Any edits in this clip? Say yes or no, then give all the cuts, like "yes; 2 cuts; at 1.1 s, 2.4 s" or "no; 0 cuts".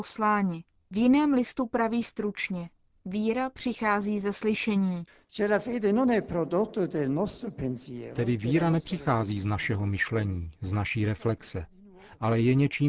no; 0 cuts